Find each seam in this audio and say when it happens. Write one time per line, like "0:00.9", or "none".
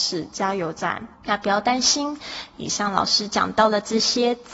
0:01.1